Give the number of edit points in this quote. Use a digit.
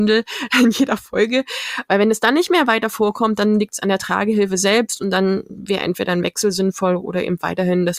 1